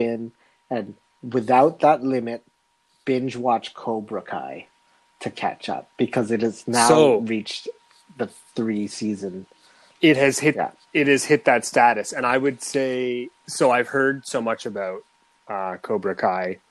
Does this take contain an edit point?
no; 0 cuts

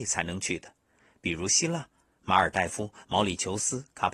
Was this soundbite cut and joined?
no; 0 cuts

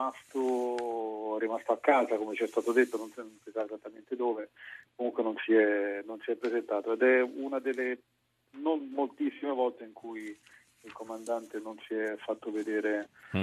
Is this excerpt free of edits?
yes; 0 cuts

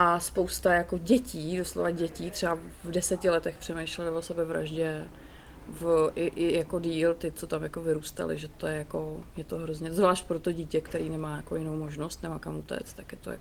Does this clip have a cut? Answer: no; 0 cuts

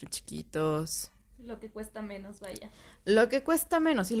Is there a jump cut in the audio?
no; 0 cuts

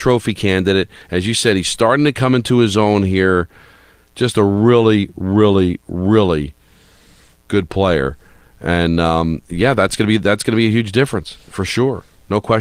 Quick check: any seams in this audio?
no; 0 cuts

